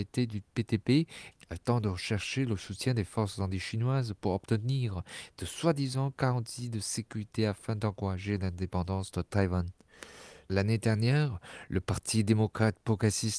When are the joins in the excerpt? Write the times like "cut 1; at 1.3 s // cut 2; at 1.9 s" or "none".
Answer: cut 1; at 1.3 s // cut 2; at 10.5 s